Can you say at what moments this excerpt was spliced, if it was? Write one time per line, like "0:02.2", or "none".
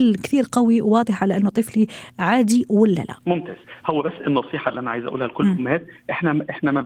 0:03.2

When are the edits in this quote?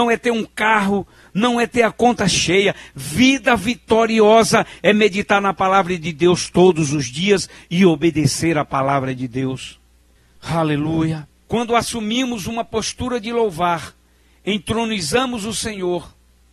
0:11.5

